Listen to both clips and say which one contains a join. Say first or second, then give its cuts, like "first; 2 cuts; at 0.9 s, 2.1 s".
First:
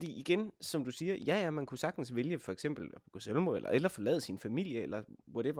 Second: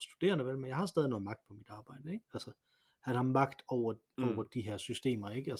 second; 1 cut; at 2.2 s